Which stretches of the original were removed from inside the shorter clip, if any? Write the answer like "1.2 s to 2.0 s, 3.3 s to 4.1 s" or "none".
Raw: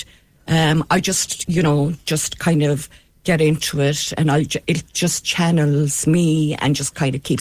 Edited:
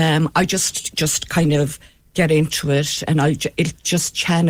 1.5 s to 2.0 s